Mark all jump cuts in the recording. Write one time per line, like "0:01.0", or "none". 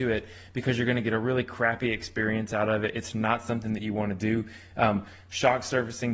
none